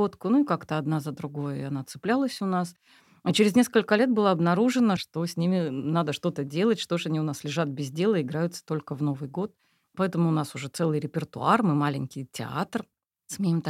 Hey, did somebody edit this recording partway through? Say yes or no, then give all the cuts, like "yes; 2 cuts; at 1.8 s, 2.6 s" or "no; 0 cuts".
yes; 1 cut; at 5.0 s